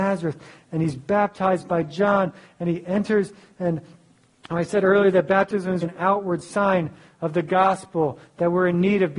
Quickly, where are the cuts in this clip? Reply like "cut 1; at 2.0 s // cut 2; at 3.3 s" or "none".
cut 1; at 5.8 s